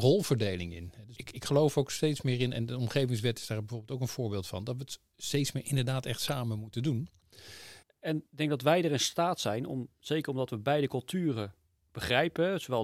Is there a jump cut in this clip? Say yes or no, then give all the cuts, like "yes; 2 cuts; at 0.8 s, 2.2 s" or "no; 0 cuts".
yes; 2 cuts; at 1.1 s, 7.8 s